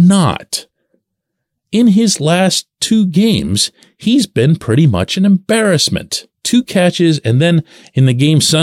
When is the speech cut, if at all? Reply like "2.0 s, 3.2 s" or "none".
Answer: 6.3 s